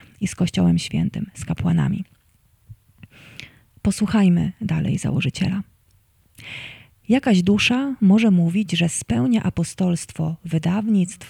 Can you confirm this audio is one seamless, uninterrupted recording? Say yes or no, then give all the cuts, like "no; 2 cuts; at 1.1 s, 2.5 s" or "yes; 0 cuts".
yes; 0 cuts